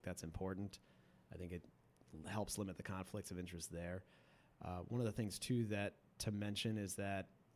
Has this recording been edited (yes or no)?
no